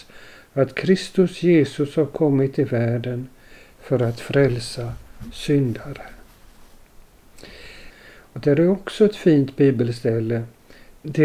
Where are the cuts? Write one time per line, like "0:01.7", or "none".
0:07.9